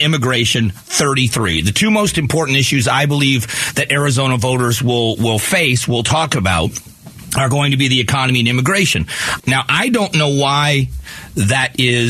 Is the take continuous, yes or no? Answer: no